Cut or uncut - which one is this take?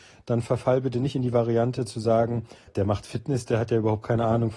cut